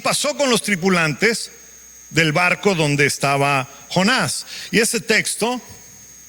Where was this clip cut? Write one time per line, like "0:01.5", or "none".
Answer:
none